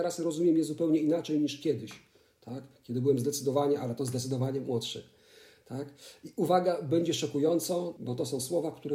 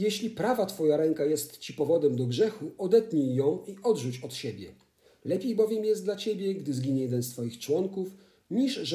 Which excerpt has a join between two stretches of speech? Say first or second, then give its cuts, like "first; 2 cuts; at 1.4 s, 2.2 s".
first; 1 cut; at 8.0 s